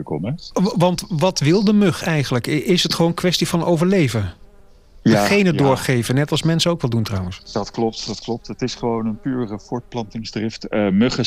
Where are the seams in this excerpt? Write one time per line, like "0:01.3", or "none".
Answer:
none